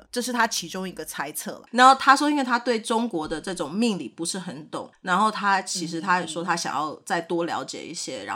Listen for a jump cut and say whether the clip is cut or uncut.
uncut